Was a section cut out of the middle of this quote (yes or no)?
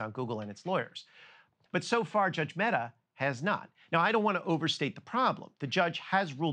no